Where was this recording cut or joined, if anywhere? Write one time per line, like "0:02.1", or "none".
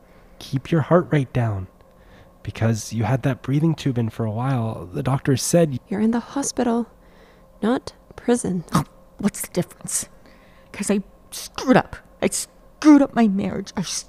0:05.8
0:10.7
0:12.2